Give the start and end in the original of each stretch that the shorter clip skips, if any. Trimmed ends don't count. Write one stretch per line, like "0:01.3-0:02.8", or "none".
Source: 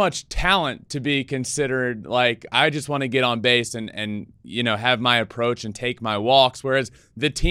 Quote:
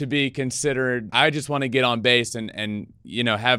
0:02.0-0:02.5